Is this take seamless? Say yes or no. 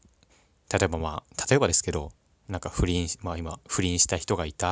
yes